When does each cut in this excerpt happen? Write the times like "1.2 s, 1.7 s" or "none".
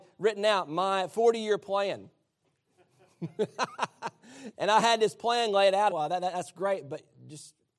4.5 s, 5.9 s